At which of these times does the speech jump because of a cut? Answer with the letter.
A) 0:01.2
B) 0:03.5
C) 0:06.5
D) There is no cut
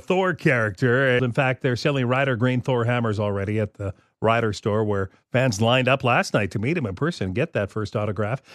A